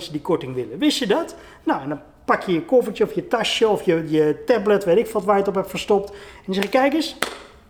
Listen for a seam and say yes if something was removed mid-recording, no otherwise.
no